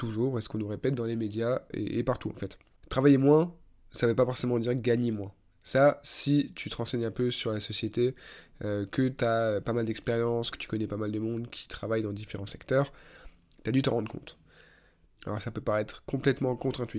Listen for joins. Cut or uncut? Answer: cut